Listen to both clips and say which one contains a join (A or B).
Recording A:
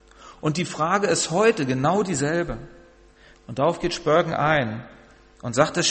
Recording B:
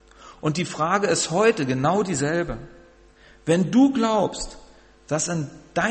A